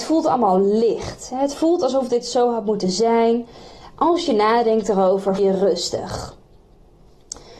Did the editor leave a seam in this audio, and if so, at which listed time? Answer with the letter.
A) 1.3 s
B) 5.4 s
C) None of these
B